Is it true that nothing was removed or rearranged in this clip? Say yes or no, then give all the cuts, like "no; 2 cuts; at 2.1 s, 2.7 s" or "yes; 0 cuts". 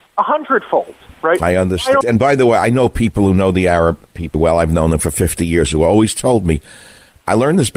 no; 2 cuts; at 2.0 s, 4.3 s